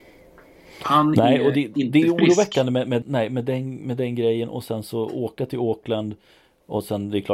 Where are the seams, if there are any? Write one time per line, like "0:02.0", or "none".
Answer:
0:03.0